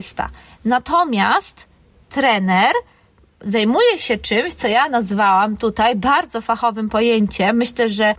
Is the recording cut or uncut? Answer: uncut